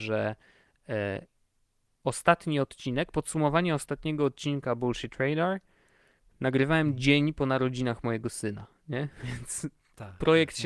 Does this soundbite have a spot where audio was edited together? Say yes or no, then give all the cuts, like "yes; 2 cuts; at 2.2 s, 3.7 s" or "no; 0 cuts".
no; 0 cuts